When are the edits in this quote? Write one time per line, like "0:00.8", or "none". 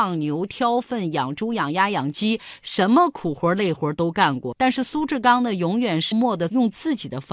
0:04.5
0:06.1